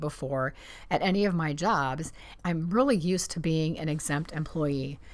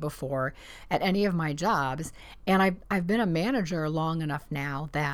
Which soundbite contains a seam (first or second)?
first